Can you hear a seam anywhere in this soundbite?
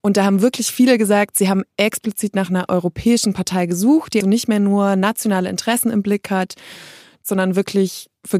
yes; 1 cut; at 4.2 s

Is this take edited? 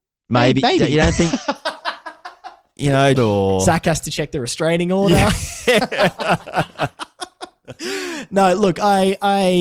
yes; 1 cut; at 3.2 s

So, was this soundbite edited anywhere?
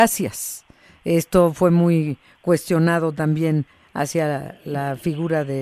no; 0 cuts

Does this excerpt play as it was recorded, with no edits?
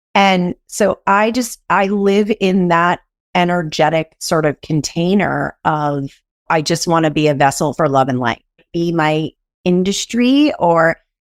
no; 2 cuts; at 6.5 s, 8.6 s

